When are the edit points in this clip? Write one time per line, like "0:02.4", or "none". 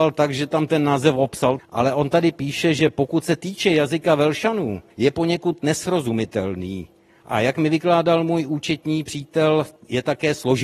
0:01.6
0:04.9